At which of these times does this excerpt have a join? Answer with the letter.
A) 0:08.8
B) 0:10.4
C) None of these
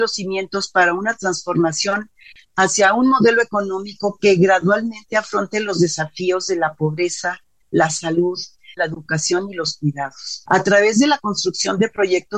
A